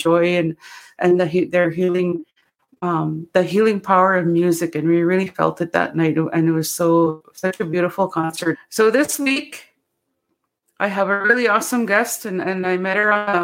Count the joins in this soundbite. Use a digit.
1